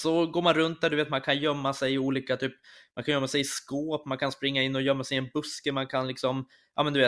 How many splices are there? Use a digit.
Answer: 0